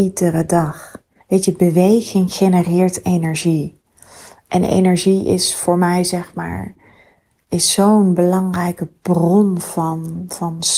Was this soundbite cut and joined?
yes; 1 cut; at 1.2 s

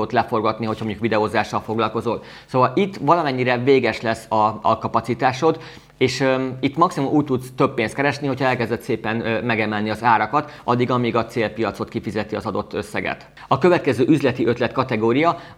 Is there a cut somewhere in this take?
no; 0 cuts

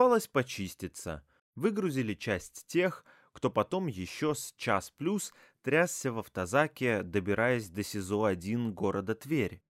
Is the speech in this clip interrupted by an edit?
yes; 1 cut; at 1.4 s

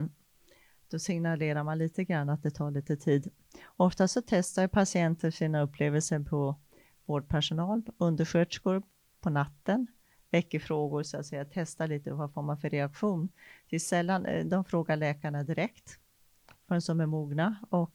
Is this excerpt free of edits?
yes; 0 cuts

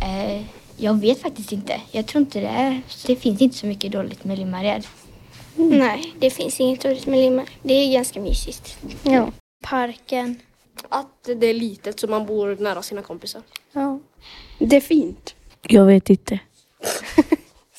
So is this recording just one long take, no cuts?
no; 3 cuts; at 3.0 s, 9.6 s, 15.5 s

